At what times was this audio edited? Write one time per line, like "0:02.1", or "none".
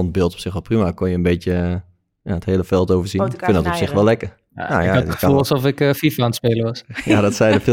none